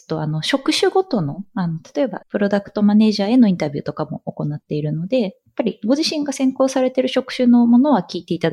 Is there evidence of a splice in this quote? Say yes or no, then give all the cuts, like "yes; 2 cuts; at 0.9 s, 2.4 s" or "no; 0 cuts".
yes; 1 cut; at 2.2 s